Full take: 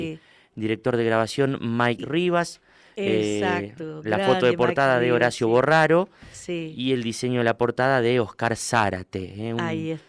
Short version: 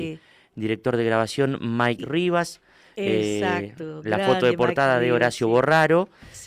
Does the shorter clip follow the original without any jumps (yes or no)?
yes